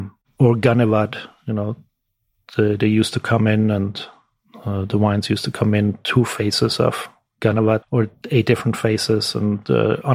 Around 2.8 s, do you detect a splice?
no; 1 cut; at 7.8 s

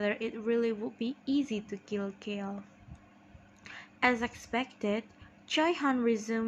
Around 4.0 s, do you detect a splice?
yes; 1 cut; at 4.0 s

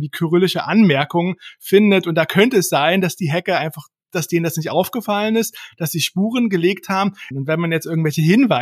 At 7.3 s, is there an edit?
yes; 1 cut; at 7.3 s

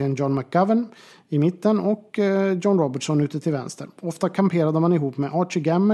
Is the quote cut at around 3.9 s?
no; 0 cuts

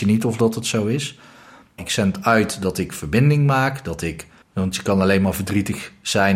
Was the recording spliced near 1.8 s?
yes; 2 cuts; at 1.8 s, 4.4 s

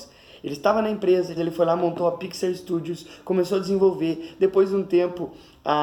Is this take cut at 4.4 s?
no; 1 cut; at 1.4 s

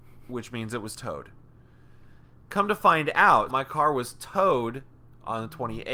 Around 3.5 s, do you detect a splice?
yes; 1 cut; at 3.5 s

